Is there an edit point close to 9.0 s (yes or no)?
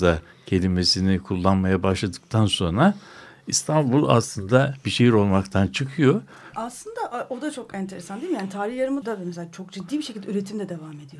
yes